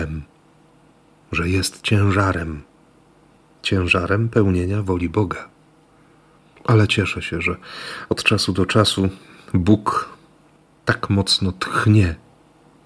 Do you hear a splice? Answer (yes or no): yes